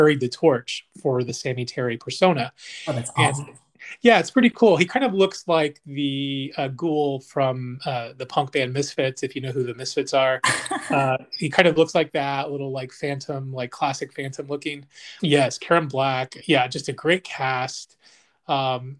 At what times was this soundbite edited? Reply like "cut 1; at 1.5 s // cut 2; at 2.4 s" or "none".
cut 1; at 15.2 s // cut 2; at 16.4 s